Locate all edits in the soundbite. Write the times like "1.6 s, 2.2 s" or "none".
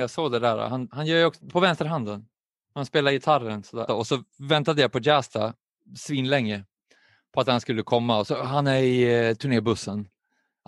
1.4 s, 3.9 s